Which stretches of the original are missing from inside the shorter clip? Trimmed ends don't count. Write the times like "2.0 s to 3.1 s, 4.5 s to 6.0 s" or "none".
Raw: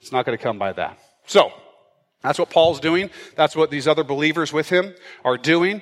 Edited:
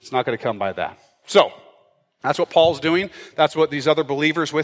none